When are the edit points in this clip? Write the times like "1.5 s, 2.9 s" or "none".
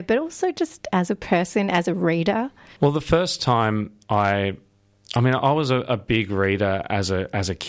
2.8 s